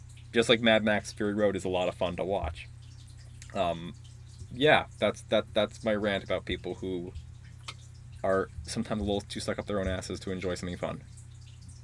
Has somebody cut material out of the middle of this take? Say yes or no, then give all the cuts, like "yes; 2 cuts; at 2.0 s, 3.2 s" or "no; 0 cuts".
no; 0 cuts